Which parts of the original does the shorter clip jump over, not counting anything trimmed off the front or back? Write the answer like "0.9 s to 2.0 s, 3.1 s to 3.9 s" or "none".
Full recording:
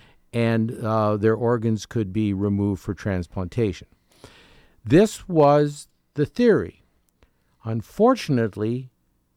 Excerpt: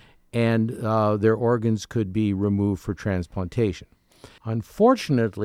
4.4 s to 7.6 s